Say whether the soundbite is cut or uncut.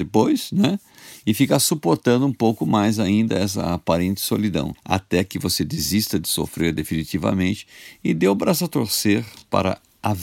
uncut